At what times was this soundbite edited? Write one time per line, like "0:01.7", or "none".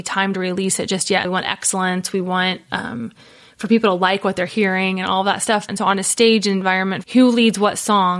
0:01.2
0:05.7
0:07.0